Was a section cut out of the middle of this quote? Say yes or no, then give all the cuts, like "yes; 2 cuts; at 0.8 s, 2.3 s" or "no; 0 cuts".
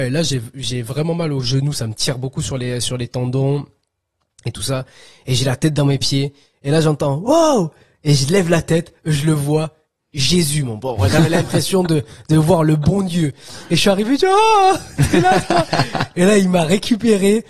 no; 0 cuts